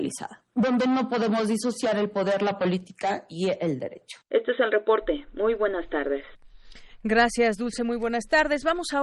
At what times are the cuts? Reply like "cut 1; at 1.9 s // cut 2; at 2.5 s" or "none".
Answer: none